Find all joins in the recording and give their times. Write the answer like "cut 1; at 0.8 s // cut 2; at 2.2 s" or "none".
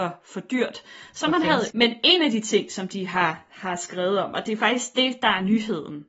cut 1; at 1.7 s